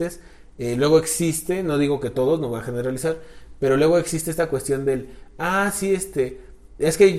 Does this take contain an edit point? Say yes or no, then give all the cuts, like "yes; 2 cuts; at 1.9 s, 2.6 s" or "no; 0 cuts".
no; 0 cuts